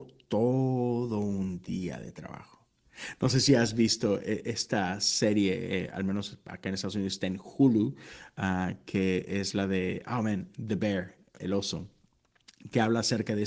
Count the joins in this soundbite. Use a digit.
1